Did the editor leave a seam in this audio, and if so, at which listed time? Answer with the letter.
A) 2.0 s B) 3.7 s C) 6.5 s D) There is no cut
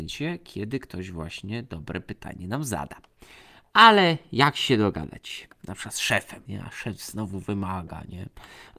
C